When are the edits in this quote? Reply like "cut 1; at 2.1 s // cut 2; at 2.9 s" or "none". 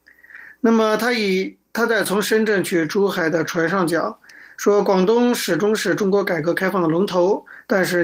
none